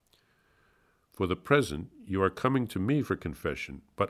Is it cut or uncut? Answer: uncut